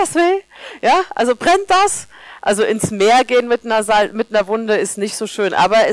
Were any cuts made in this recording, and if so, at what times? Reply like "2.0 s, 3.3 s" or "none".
none